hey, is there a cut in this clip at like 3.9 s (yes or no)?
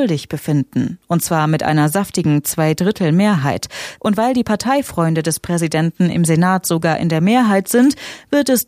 yes